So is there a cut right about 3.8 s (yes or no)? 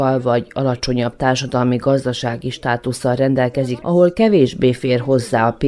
yes